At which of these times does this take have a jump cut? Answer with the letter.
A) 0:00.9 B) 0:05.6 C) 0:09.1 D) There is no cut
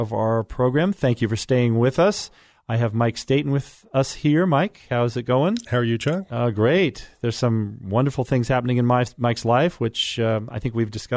B